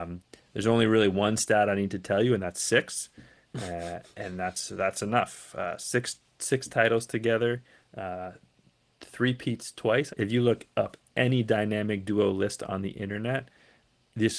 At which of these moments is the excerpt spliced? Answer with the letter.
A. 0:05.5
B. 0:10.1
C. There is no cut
B